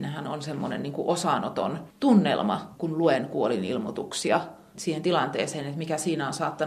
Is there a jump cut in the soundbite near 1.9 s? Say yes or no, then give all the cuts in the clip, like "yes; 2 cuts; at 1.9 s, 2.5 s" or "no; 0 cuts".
yes; 2 cuts; at 1.9 s, 4.7 s